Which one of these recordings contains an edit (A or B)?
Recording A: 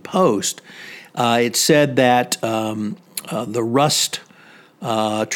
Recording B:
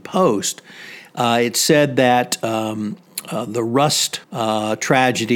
B